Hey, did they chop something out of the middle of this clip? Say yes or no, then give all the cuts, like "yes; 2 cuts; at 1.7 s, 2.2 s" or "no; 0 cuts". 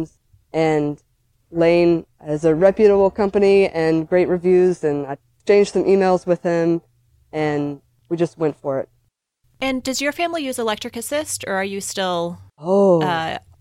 no; 0 cuts